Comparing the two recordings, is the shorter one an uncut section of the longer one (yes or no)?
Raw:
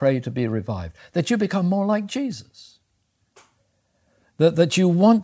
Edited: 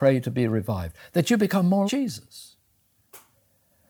no